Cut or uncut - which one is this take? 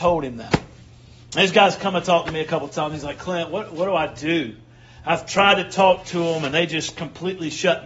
uncut